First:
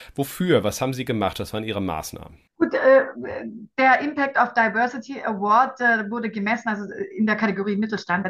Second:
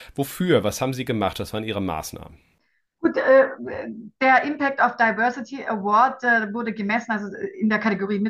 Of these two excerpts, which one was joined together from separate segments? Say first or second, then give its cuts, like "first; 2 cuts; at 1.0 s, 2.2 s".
first; 1 cut; at 2.5 s